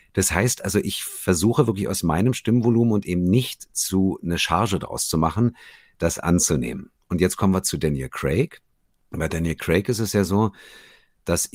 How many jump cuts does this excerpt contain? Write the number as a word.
zero